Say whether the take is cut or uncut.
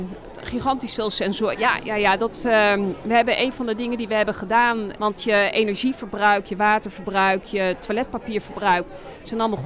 cut